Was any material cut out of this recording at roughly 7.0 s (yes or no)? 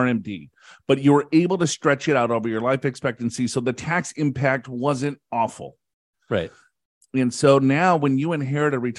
yes